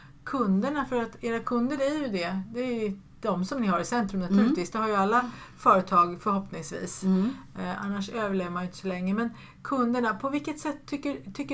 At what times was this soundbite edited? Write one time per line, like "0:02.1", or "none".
none